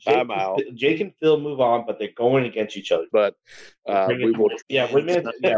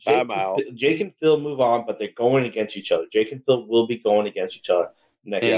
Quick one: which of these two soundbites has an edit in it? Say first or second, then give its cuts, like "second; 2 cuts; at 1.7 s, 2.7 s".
first; 2 cuts; at 3.1 s, 4.6 s